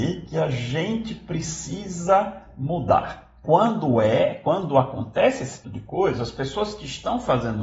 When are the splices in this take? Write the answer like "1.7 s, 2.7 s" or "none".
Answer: 3.4 s, 5.6 s